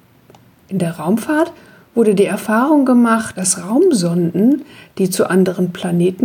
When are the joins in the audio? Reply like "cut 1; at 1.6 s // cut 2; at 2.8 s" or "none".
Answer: none